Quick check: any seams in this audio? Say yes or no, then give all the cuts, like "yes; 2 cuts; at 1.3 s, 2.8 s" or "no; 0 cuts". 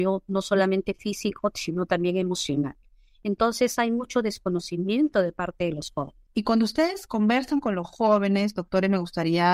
yes; 1 cut; at 6.3 s